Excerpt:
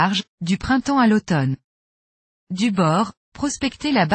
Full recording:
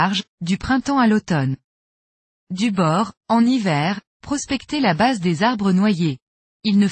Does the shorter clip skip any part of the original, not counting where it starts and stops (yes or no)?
yes